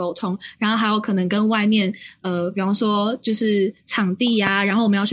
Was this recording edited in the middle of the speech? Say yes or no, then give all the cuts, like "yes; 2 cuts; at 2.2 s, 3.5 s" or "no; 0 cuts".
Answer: no; 0 cuts